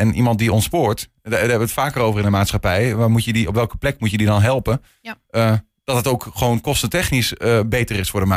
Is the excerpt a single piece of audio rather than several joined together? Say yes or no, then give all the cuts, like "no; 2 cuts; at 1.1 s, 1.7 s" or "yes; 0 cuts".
yes; 0 cuts